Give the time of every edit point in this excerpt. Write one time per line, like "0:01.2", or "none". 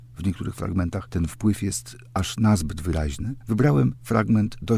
0:03.4